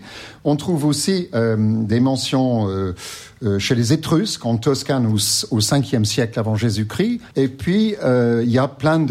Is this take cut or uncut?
cut